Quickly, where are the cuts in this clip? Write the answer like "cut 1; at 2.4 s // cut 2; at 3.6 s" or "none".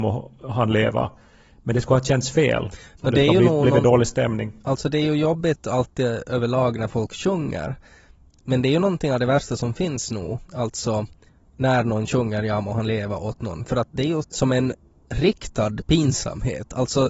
cut 1; at 14.2 s

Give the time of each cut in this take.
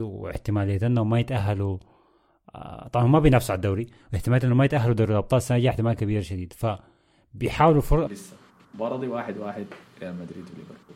cut 1; at 8.1 s

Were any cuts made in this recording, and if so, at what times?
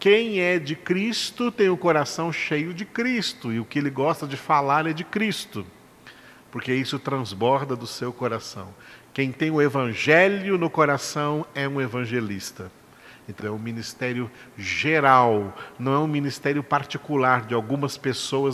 cut 1; at 13.4 s

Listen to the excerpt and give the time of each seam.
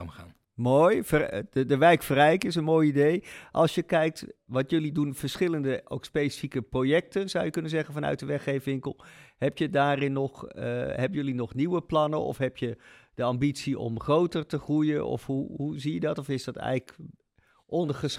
none

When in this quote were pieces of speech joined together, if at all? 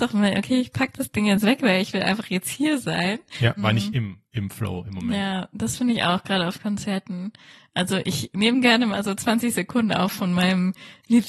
cut 1; at 3.6 s

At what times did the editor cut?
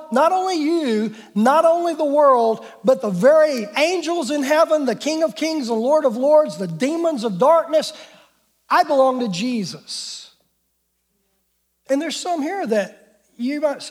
none

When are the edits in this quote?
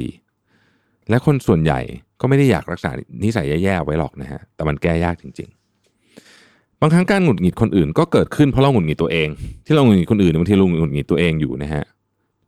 cut 1; at 9.6 s

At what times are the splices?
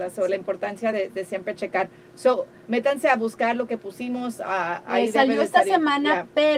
none

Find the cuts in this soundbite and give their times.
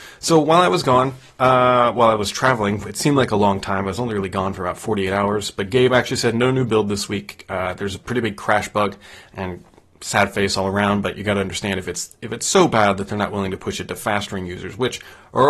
none

